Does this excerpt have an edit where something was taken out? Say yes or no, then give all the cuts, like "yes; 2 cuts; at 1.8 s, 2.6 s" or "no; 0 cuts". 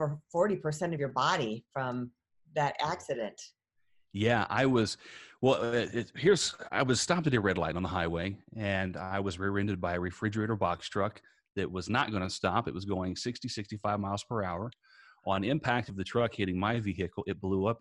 no; 0 cuts